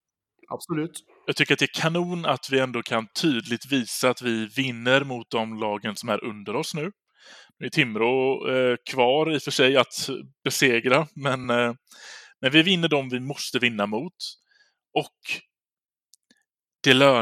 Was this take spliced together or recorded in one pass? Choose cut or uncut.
uncut